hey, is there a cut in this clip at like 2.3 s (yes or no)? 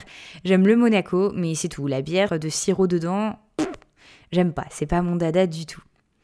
yes